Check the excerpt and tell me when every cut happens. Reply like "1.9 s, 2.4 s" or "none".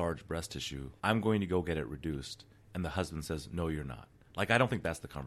none